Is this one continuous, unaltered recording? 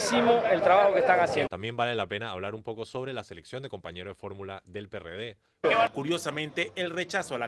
no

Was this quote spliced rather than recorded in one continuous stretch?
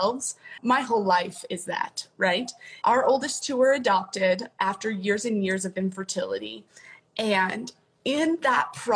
yes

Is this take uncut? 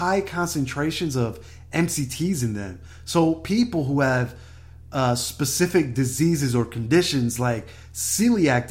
yes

